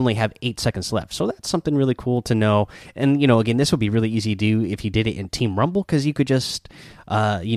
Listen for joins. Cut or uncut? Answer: uncut